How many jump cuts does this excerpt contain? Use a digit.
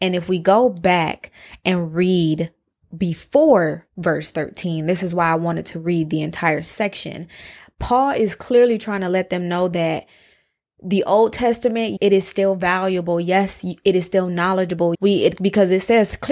2